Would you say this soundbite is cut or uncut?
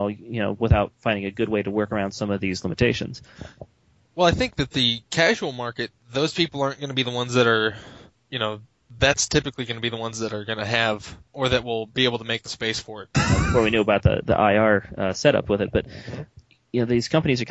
cut